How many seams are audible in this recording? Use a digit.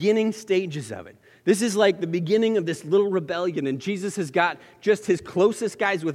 0